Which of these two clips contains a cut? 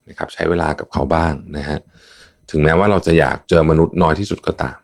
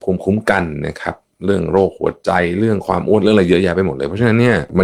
first; 1 cut; at 3.4 s

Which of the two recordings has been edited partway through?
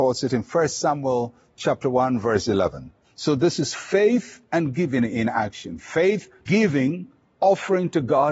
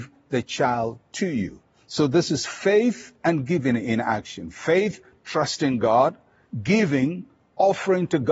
first; 2 cuts; at 3.0 s, 6.5 s

